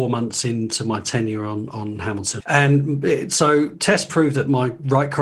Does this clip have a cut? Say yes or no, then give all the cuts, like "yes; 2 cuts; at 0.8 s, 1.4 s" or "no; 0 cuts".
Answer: yes; 1 cut; at 2.4 s